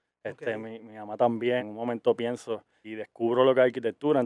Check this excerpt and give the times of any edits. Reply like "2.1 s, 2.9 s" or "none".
1.6 s, 2.8 s